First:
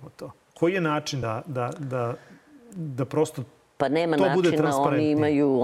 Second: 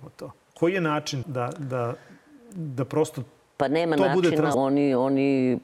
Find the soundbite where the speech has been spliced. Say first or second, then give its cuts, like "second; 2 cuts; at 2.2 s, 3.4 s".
second; 2 cuts; at 1.2 s, 4.5 s